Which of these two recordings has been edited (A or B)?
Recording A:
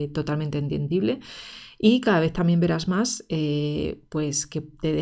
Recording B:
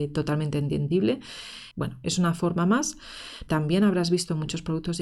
B